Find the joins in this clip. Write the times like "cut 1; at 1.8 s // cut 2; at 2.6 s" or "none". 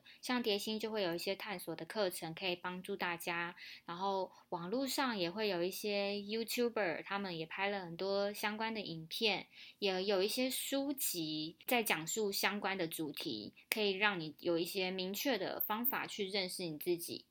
none